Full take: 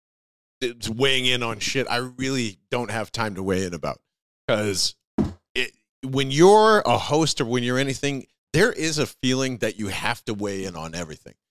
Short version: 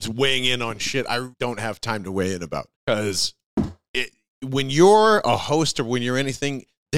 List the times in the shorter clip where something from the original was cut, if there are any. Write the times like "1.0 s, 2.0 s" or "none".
1.3 s, 2.7 s